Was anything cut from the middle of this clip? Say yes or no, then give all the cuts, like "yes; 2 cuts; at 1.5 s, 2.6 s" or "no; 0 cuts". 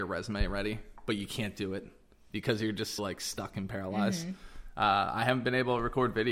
yes; 1 cut; at 3.0 s